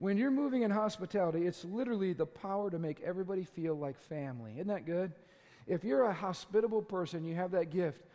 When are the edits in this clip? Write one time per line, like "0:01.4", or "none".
none